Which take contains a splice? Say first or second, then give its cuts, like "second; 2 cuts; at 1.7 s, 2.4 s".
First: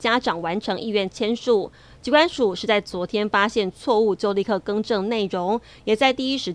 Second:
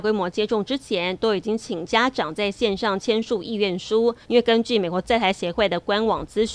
second; 1 cut; at 4.2 s